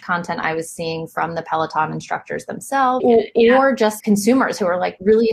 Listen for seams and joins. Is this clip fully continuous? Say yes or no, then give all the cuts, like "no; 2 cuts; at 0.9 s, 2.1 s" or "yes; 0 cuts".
no; 2 cuts; at 3.0 s, 4.0 s